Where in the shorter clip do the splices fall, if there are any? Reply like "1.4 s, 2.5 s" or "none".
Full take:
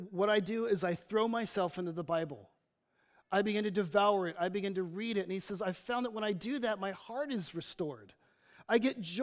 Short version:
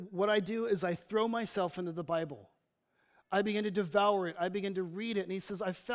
none